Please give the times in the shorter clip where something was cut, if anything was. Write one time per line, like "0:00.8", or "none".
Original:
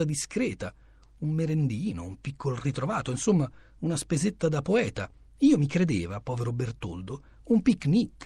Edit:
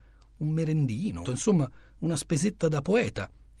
0:01.2